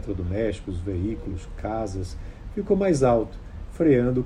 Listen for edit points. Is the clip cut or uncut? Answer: uncut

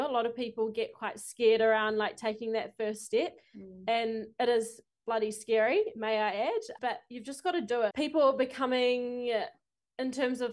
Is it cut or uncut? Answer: cut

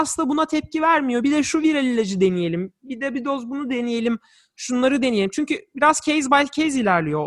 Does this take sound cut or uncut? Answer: uncut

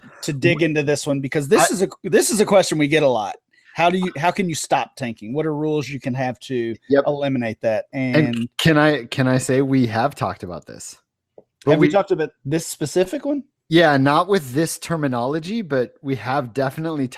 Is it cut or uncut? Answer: uncut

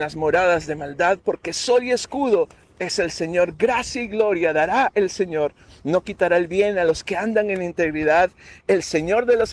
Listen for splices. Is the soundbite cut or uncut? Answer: uncut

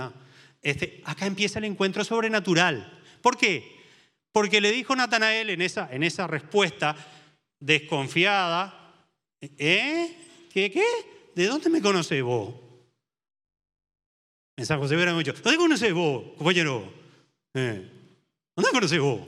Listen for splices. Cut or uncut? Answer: uncut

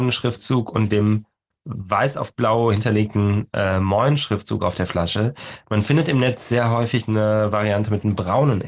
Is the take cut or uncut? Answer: uncut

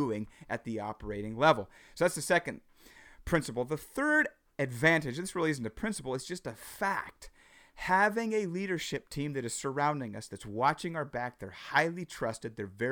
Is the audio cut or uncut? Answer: uncut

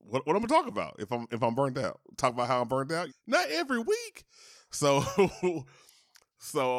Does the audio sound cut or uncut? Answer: cut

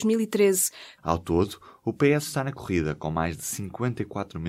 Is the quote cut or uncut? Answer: cut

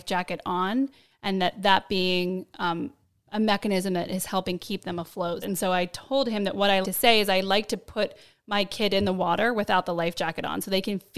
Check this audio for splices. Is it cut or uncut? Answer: cut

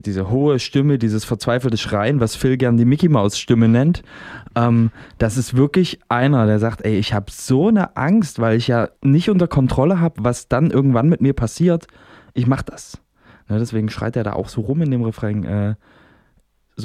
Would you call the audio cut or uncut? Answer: cut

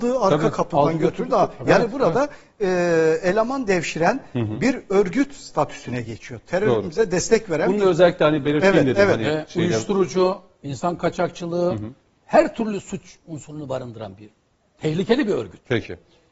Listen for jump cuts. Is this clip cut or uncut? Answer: uncut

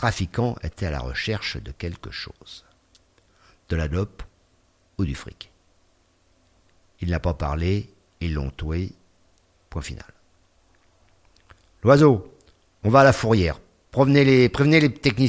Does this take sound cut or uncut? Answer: uncut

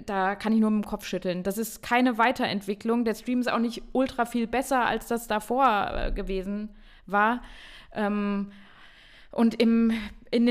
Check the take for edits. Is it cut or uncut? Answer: uncut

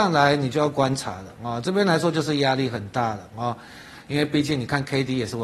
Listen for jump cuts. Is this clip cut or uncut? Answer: uncut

